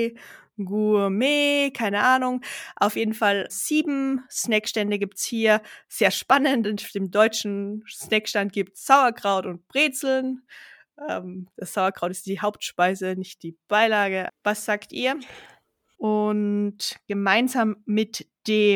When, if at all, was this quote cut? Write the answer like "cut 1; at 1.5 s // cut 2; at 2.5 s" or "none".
cut 1; at 3.5 s // cut 2; at 14.3 s // cut 3; at 15.9 s